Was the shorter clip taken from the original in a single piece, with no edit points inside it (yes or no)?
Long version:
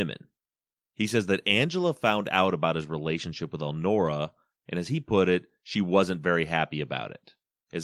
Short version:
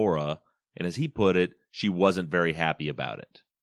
yes